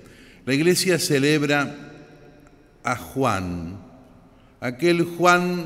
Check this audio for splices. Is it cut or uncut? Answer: uncut